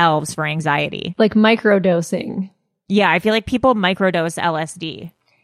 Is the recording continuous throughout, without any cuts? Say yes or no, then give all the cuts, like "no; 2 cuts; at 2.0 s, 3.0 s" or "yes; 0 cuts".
yes; 0 cuts